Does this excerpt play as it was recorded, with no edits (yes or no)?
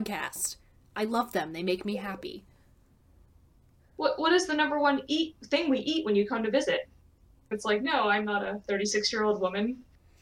no